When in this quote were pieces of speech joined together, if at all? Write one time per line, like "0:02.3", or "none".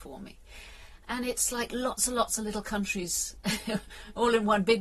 0:01.0